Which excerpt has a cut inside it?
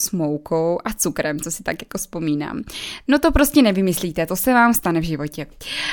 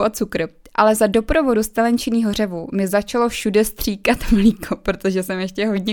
first; 1 cut; at 3.0 s

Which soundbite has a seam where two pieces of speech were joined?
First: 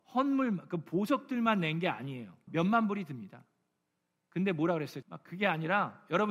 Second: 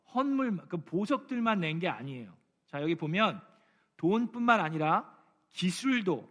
first; 2 cuts; at 2.5 s, 5.0 s

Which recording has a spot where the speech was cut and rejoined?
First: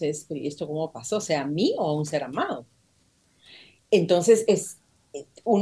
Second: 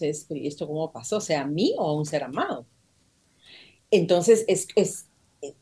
first; 1 cut; at 4.5 s

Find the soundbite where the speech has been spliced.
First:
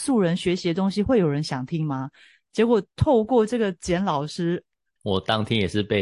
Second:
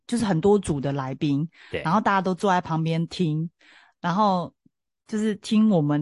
first; 1 cut; at 5.0 s

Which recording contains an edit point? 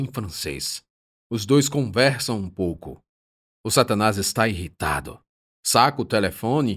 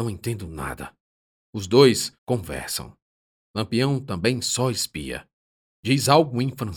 second; 2 cuts; at 2.2 s, 5.7 s

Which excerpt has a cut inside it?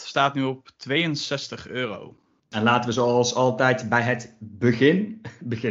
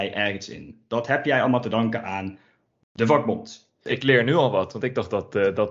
first; 1 cut; at 2.4 s

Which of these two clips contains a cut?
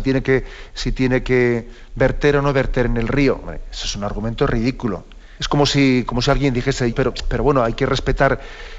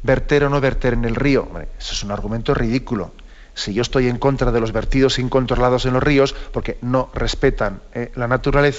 first; 2 cuts; at 5.4 s, 6.9 s

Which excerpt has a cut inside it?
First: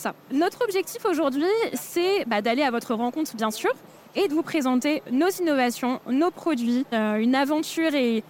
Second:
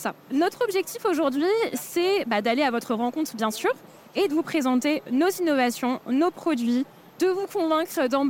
first; 1 cut; at 6.9 s

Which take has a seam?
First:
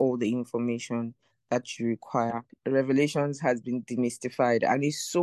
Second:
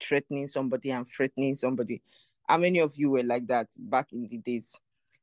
first; 1 cut; at 2.5 s

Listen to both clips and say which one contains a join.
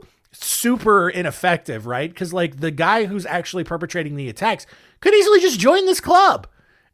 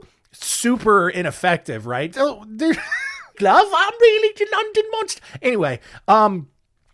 second; 2 cuts; at 2.1 s, 3.3 s

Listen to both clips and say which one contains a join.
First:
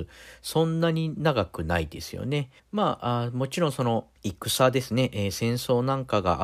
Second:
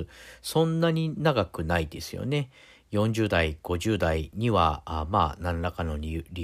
first; 2 cuts; at 2.6 s, 4.2 s

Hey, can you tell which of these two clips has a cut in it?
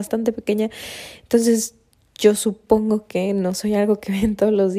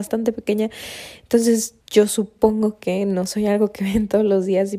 second; 1 cut; at 1.8 s

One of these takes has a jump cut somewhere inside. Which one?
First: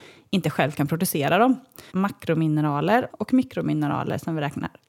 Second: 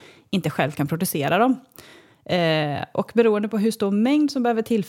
first; 2 cuts; at 1.9 s, 3.1 s

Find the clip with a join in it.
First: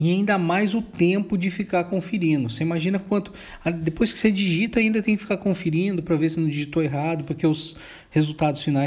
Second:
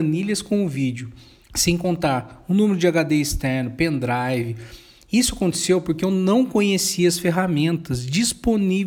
second; 1 cut; at 1.4 s

